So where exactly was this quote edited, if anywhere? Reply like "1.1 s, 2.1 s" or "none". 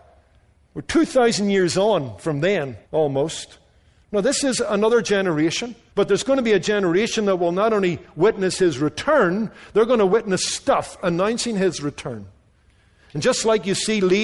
2.8 s, 5.9 s